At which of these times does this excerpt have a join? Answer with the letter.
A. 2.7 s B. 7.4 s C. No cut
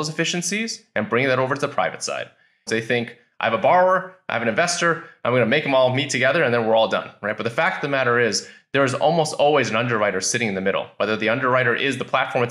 A